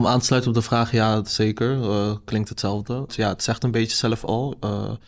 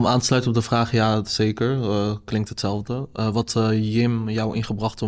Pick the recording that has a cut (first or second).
first